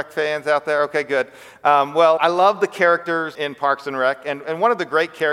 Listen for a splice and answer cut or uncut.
cut